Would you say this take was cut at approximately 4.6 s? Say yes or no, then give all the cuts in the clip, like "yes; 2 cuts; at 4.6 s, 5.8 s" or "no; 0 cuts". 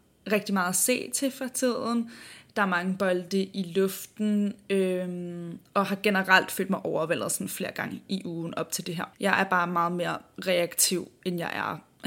no; 1 cut; at 9.1 s